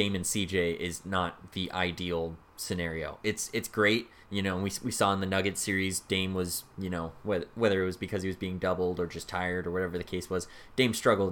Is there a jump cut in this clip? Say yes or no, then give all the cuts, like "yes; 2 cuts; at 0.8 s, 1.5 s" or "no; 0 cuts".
no; 0 cuts